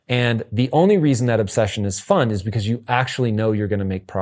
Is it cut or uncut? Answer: uncut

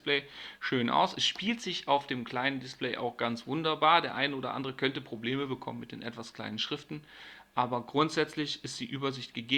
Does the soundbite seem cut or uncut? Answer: uncut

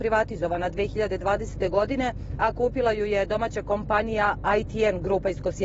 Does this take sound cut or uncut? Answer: uncut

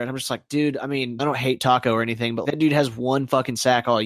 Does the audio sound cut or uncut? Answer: cut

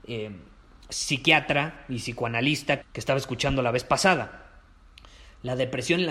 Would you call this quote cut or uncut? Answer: cut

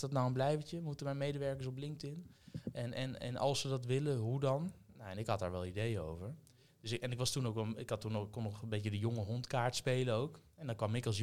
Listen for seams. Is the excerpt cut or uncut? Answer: uncut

